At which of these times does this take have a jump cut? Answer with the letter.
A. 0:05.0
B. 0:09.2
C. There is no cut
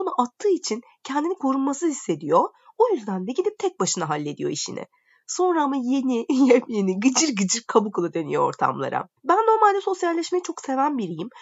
B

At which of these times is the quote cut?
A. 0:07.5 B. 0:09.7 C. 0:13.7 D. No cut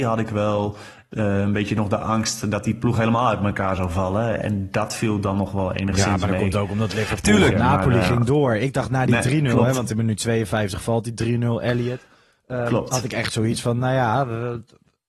A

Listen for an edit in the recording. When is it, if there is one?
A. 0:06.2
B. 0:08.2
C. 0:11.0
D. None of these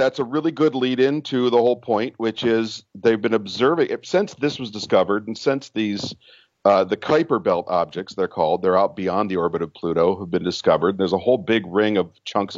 D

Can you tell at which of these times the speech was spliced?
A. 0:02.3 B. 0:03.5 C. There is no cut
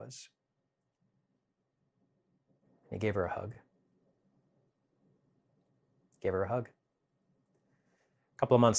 C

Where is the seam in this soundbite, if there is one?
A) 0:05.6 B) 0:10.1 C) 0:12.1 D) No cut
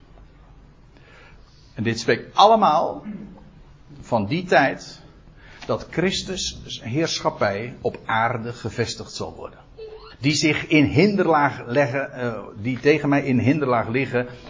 B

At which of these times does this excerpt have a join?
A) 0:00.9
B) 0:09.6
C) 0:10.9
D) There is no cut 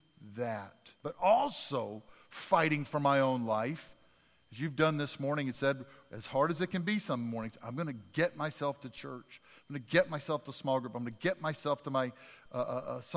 A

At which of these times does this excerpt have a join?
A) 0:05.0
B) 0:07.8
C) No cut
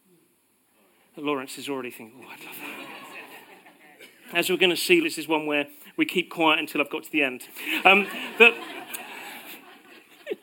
A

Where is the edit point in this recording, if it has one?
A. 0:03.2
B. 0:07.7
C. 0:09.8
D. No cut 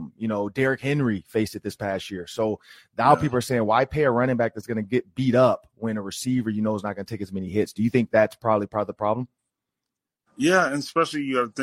D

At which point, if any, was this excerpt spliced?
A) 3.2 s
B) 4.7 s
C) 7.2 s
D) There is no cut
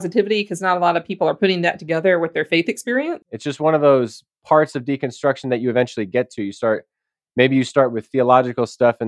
A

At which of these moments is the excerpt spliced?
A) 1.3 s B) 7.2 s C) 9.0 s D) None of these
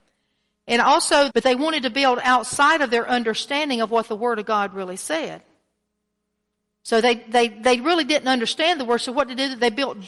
A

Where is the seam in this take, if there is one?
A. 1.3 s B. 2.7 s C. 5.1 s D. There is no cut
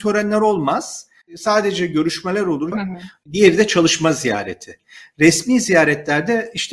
B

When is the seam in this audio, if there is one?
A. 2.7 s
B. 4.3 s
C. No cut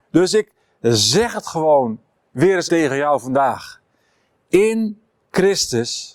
A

